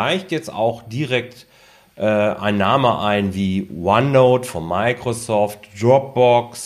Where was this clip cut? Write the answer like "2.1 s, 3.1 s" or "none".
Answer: none